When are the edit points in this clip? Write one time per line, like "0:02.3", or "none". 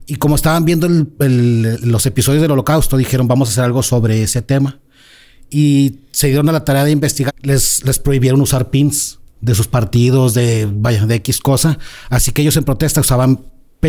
0:07.3